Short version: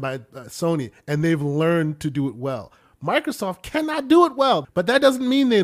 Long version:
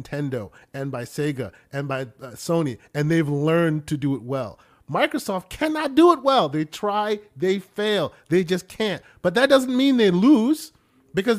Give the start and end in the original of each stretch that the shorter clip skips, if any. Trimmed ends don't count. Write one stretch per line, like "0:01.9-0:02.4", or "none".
0:06.5-0:09.1